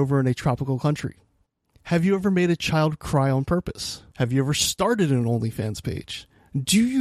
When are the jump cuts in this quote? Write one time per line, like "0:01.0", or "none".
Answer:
0:04.1